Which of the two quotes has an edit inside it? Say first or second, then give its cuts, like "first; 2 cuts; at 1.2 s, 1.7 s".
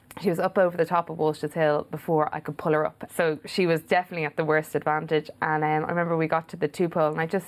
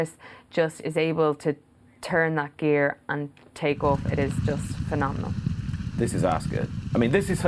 first; 1 cut; at 3.1 s